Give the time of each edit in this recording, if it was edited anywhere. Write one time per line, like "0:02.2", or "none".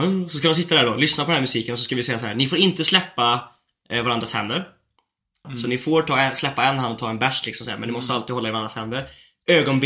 0:05.4